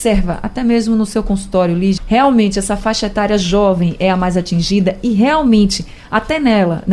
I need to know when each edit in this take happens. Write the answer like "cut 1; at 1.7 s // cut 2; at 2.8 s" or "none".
cut 1; at 2.0 s